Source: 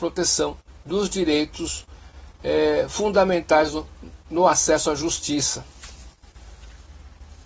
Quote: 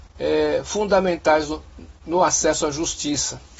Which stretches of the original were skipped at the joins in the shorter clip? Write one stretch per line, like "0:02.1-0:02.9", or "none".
none